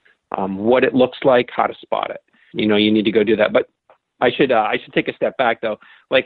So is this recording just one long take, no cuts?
no; 1 cut; at 2.5 s

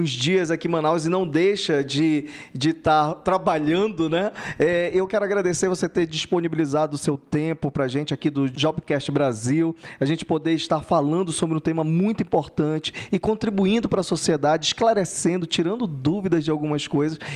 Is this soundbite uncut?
yes; 0 cuts

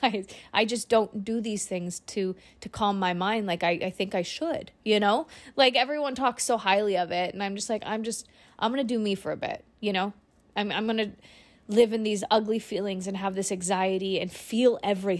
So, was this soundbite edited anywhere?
no; 0 cuts

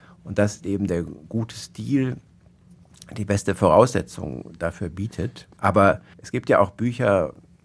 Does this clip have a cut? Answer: yes; 1 cut; at 5.5 s

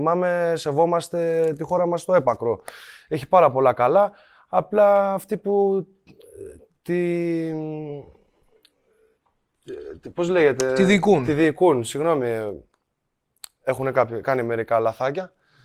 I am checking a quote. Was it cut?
no; 0 cuts

